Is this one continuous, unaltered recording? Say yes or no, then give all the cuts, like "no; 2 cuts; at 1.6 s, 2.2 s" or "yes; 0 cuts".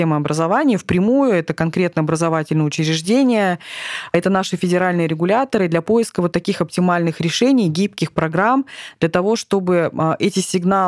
yes; 0 cuts